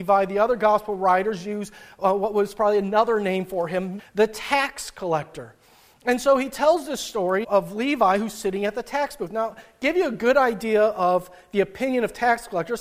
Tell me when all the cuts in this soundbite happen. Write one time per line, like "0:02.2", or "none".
0:04.0
0:07.4

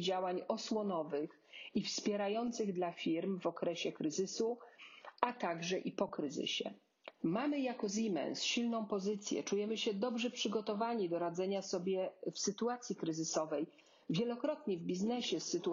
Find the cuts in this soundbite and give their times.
0:07.2

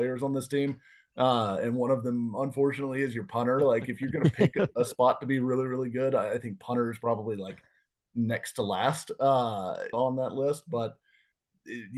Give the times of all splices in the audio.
0:09.9

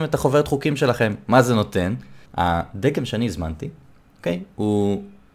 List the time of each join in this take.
0:02.3

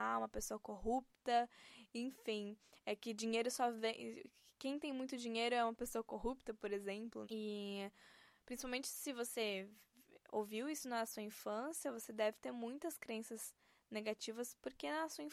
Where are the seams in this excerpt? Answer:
0:07.2

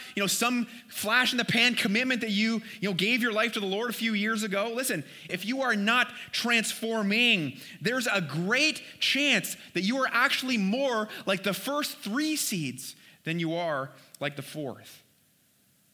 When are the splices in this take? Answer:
0:05.3

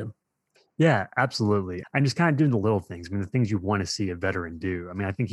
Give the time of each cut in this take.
0:01.8

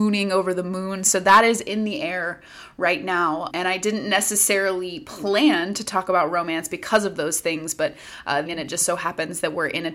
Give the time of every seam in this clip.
0:03.5
0:08.5

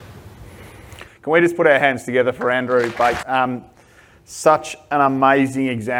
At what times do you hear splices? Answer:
0:01.1
0:03.2

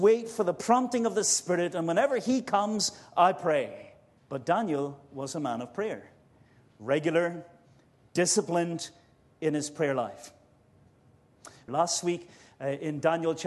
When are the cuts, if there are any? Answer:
0:04.2
0:11.7

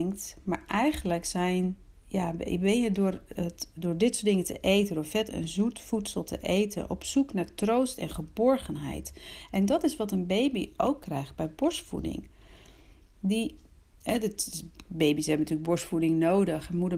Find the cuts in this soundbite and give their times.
0:03.8

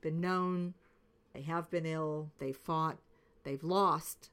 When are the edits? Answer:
0:01.3

